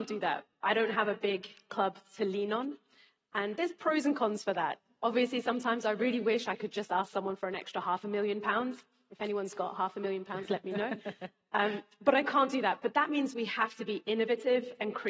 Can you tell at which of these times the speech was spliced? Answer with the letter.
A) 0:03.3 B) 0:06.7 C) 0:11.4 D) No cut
D